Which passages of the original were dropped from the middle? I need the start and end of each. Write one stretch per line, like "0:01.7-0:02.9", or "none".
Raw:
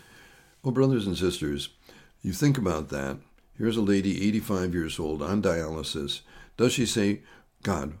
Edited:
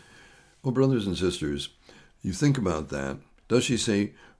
0:03.4-0:06.5